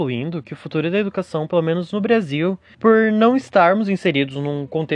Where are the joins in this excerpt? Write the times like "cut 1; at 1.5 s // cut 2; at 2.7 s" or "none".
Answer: cut 1; at 2.7 s

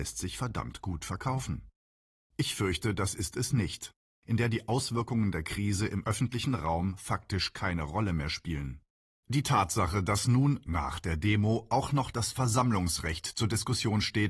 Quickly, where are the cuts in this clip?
cut 1; at 2.3 s // cut 2; at 4.2 s

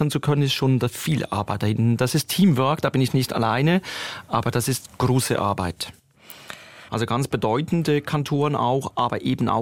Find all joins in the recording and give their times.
cut 1; at 6.9 s

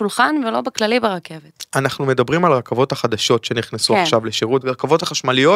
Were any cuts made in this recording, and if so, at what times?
cut 1; at 4.6 s

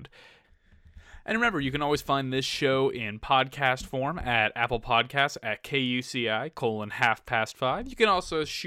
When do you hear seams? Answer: none

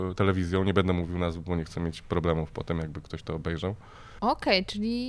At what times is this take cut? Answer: cut 1; at 4.2 s

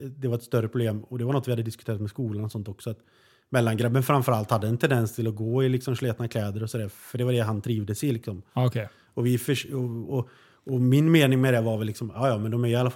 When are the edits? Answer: none

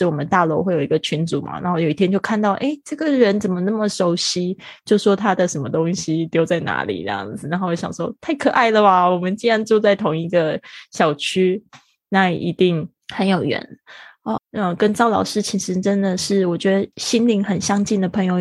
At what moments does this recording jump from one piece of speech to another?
cut 1; at 14.4 s // cut 2; at 16.9 s

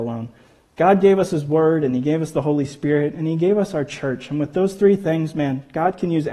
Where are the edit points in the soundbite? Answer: none

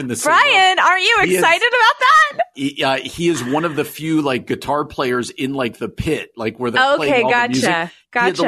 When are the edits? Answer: cut 1; at 2.5 s

